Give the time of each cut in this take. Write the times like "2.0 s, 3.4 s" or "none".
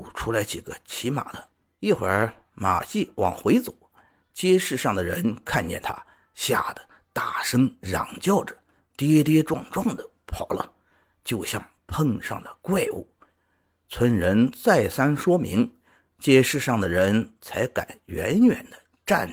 1.7 s